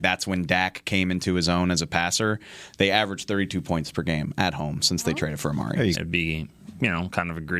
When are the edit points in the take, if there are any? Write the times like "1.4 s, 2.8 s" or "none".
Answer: 5.9 s